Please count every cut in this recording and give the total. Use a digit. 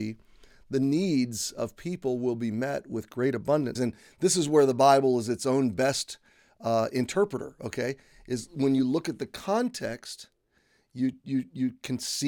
1